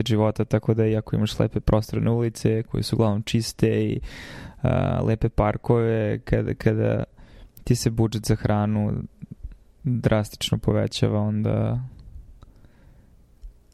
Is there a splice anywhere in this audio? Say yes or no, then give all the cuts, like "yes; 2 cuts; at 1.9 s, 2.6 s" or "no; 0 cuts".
no; 0 cuts